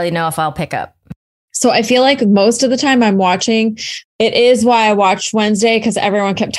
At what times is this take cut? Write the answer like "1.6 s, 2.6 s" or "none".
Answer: 1.5 s, 4.0 s